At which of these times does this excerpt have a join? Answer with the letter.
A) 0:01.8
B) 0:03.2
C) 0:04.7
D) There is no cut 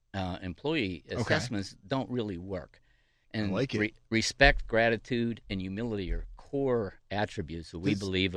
B